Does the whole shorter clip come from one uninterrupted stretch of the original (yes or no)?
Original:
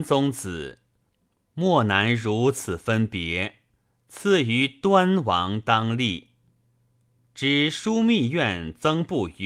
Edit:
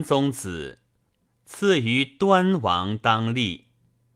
no